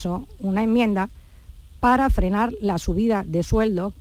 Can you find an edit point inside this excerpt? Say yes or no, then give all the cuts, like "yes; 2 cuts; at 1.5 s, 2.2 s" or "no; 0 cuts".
no; 0 cuts